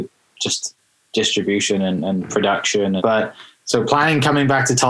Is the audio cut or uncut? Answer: cut